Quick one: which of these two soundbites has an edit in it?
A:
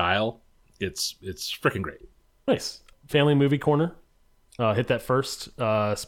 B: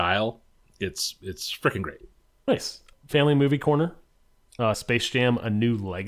B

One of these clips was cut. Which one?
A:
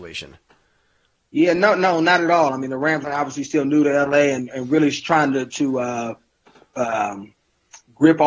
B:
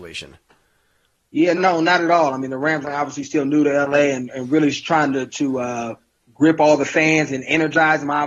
B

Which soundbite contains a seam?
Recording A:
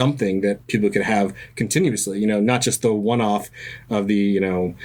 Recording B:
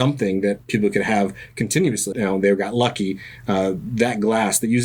B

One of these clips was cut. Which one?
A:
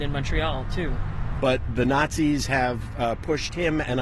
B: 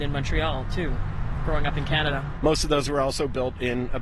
A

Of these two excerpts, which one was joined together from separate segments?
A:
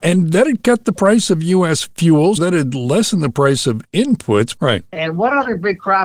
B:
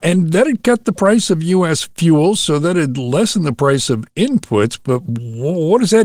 A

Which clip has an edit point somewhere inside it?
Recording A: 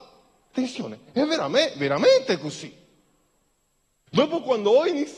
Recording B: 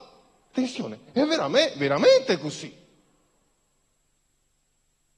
A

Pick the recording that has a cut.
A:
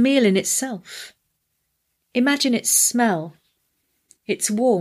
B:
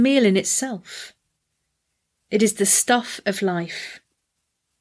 A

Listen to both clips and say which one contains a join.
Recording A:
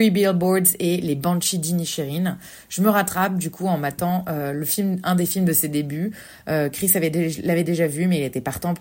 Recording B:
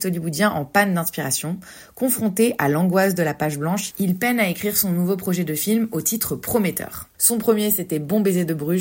B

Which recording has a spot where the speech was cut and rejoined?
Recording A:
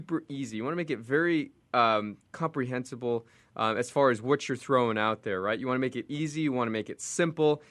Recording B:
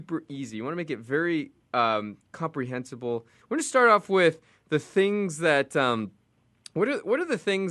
B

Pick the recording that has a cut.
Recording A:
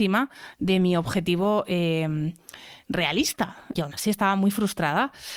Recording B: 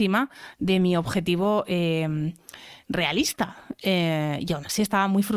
A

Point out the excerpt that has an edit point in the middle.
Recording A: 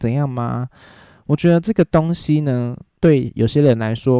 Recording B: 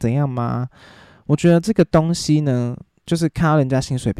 A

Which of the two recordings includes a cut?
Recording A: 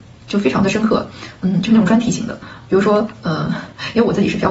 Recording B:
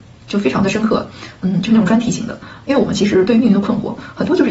B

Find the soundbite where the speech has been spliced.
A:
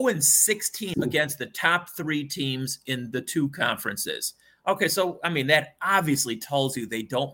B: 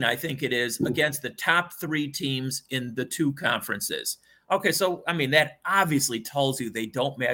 A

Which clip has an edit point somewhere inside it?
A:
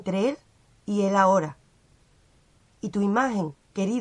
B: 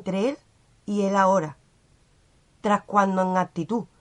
B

